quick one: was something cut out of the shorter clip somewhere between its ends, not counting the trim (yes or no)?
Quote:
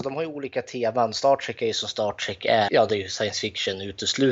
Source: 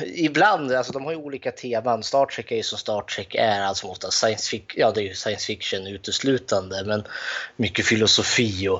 yes